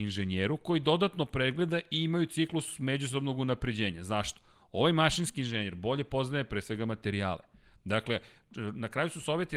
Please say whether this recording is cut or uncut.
uncut